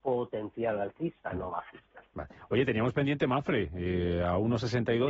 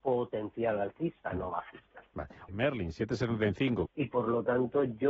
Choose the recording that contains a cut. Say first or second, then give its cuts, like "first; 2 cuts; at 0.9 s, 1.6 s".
second; 2 cuts; at 2.5 s, 3.9 s